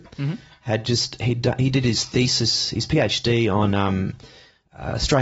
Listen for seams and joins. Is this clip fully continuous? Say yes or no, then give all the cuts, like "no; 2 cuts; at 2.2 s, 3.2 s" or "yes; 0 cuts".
yes; 0 cuts